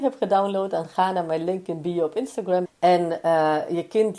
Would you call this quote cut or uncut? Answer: cut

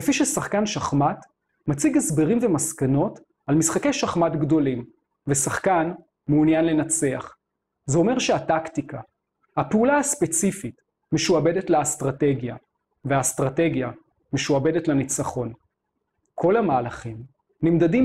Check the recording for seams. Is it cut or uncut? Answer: cut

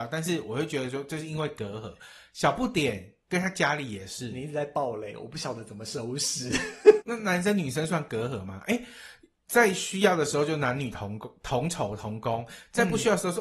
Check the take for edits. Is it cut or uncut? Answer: cut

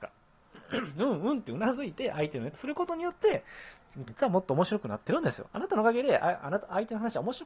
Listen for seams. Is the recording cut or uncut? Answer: cut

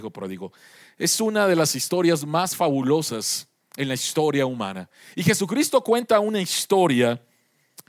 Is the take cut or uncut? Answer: uncut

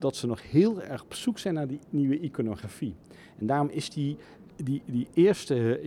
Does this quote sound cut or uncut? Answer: uncut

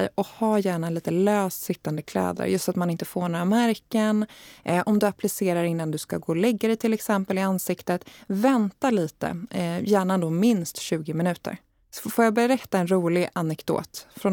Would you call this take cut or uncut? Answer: uncut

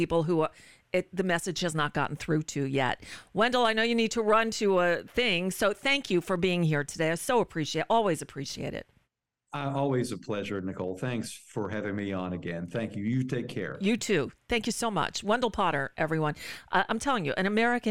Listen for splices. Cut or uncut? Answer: uncut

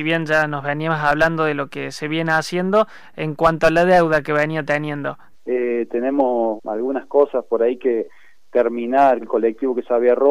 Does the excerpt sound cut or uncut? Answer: cut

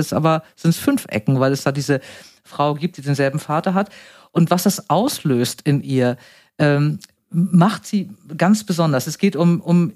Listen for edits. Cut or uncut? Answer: uncut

